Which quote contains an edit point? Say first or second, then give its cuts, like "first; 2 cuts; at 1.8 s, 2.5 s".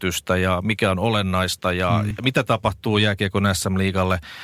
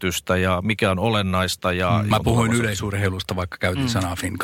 second; 1 cut; at 2.1 s